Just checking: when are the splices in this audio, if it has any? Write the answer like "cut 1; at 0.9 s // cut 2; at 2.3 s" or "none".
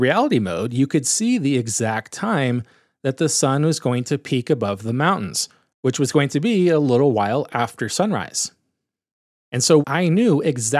cut 1; at 9.8 s